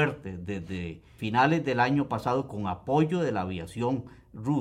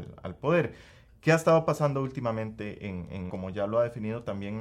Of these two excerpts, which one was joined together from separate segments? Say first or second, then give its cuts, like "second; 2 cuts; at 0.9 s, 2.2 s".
second; 1 cut; at 3.3 s